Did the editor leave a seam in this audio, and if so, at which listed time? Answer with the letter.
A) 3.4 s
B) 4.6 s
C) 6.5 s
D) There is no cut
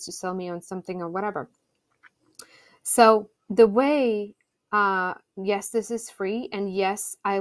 A